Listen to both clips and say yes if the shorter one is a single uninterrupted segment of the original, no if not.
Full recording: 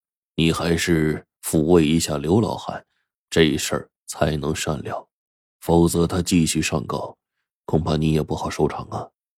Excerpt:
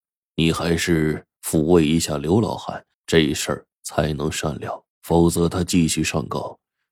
no